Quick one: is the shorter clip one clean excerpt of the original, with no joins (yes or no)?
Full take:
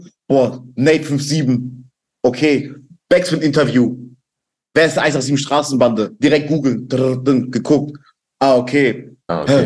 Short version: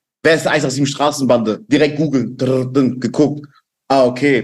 yes